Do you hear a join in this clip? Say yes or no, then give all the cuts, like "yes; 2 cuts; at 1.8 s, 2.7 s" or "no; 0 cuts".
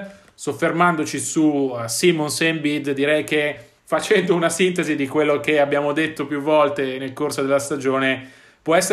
yes; 1 cut; at 3.8 s